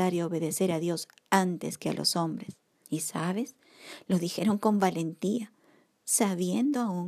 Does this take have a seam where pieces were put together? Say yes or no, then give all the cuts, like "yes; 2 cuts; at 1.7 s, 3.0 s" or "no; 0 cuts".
yes; 1 cut; at 2.8 s